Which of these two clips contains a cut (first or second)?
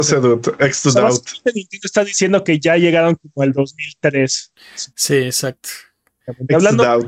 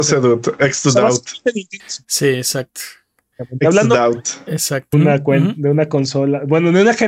second